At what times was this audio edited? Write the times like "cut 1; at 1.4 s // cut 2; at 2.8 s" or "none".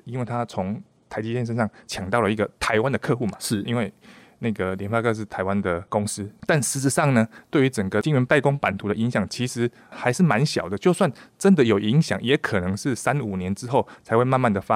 none